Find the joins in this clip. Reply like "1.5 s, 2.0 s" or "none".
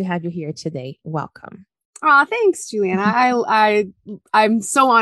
none

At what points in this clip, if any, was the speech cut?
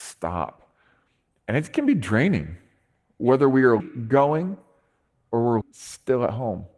3.8 s, 5.6 s

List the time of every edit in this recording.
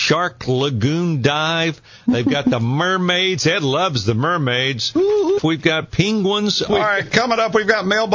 5.4 s, 6.7 s

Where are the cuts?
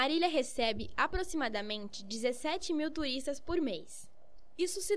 none

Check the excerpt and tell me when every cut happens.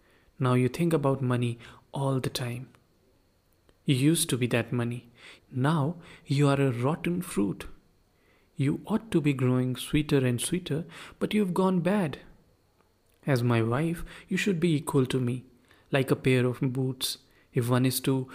5.4 s

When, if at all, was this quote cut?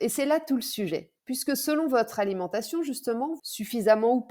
1.2 s, 3.4 s

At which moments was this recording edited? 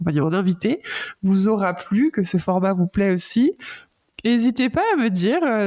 none

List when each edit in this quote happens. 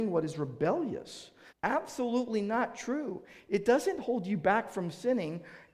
1.5 s

